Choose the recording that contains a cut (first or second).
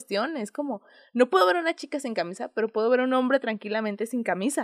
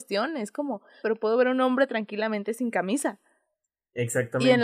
second